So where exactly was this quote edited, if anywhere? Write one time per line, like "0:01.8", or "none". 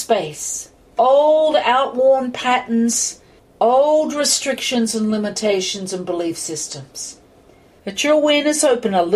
0:03.4
0:07.8